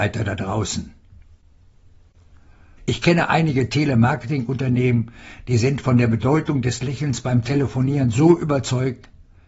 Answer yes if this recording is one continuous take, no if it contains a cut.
no